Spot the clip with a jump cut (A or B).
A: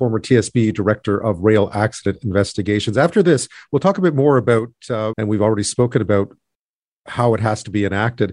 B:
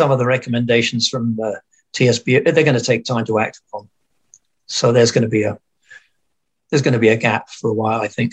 A